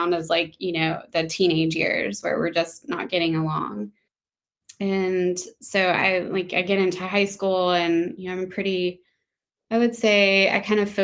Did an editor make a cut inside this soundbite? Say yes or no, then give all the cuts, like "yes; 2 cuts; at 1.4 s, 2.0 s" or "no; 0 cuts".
no; 0 cuts